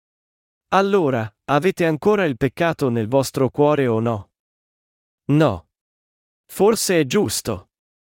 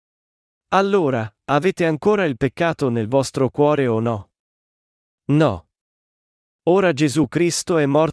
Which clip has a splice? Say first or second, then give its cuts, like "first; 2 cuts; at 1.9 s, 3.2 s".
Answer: first; 1 cut; at 6.3 s